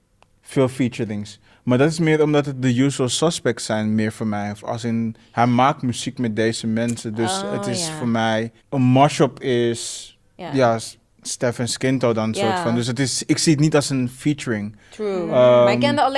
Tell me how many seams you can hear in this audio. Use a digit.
1